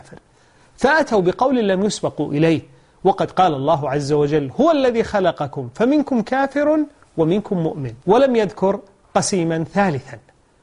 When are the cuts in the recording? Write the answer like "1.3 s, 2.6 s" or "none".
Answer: 8.0 s

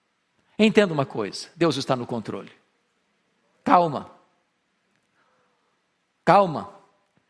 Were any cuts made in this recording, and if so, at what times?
none

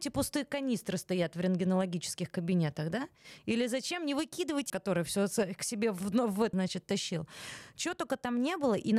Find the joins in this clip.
4.7 s, 6.5 s

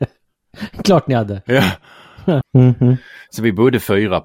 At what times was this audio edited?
2.4 s

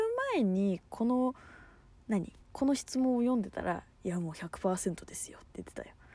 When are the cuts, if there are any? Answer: 2.4 s

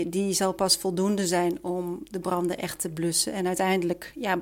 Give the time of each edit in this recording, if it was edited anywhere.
none

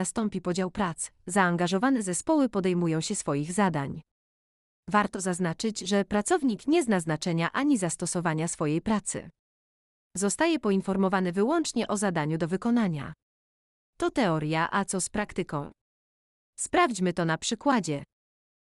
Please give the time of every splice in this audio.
none

